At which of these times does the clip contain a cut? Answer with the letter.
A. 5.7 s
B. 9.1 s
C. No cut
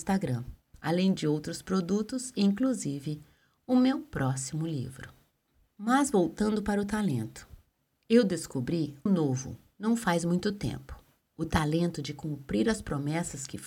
B